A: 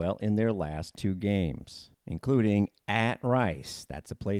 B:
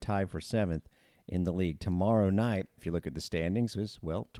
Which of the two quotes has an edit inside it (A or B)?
B